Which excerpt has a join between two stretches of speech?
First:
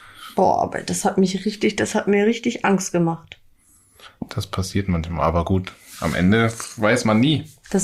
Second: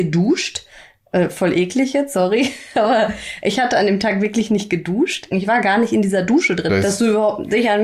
second; 2 cuts; at 5.3 s, 6.7 s

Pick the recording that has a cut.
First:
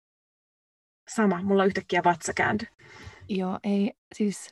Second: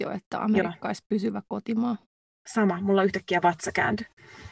first; 1 cut; at 1.0 s

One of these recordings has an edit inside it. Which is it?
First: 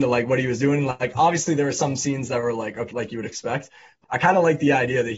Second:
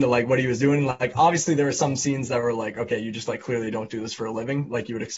first; 2 cuts; at 2.9 s, 4.0 s

